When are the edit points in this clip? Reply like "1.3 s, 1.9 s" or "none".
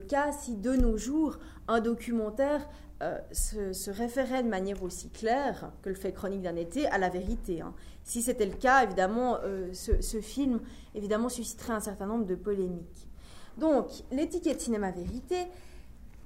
none